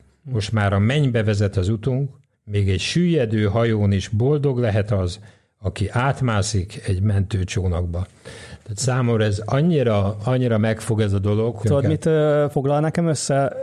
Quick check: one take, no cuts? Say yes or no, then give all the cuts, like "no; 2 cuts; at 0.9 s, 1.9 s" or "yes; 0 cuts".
no; 2 cuts; at 2.3 s, 11.6 s